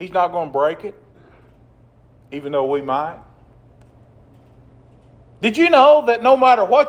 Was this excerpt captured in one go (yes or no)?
yes